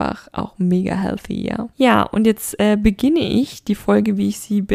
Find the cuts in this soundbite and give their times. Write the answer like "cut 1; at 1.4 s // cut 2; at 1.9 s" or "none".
cut 1; at 1.7 s